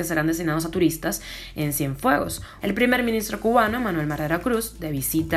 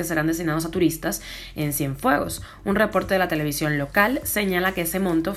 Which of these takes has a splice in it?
first; 1 cut; at 2.6 s

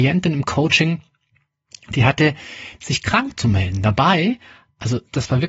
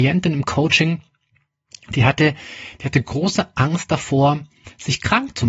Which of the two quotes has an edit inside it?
first; 1 cut; at 2.8 s

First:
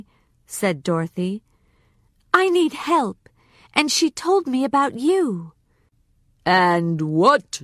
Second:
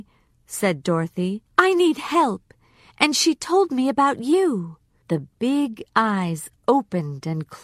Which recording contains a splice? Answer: second; 2 cuts; at 1.5 s, 5.0 s

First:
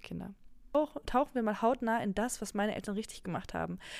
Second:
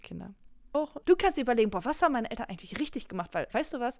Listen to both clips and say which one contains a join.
second; 1 cut; at 1.0 s

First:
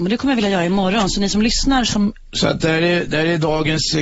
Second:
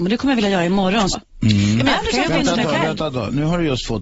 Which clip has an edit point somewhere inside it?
second; 1 cut; at 1.1 s

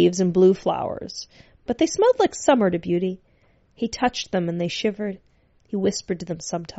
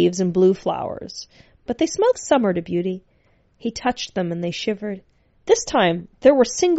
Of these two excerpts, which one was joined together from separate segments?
second; 2 cuts; at 2.1 s, 5.3 s

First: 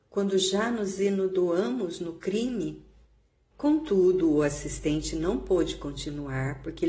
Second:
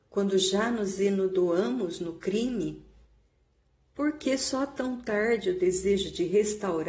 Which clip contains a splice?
first; 1 cut; at 3.5 s

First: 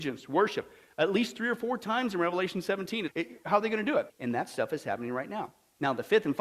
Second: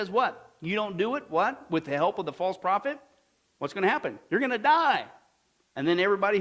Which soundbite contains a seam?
first; 2 cuts; at 3.1 s, 4.1 s

